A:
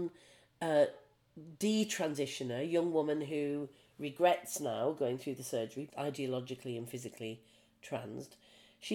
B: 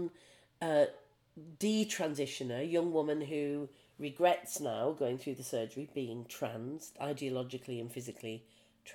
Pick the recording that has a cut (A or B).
A